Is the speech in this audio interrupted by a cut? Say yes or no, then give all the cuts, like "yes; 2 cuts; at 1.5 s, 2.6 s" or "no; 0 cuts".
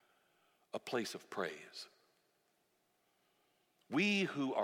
no; 0 cuts